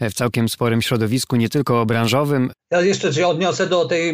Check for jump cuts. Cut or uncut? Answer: cut